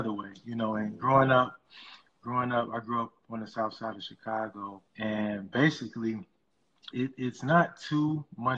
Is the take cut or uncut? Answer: cut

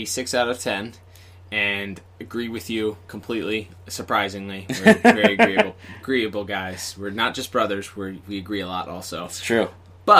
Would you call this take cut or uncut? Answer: uncut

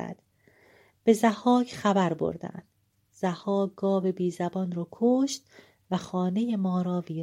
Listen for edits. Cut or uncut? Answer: uncut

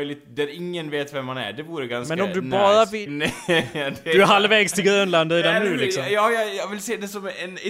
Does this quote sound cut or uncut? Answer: cut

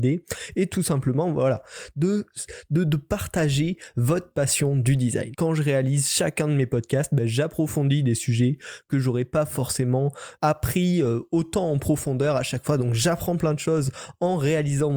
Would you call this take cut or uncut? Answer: cut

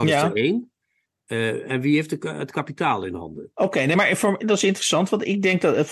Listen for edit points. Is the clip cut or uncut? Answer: uncut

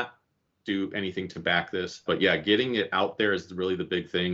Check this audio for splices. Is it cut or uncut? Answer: cut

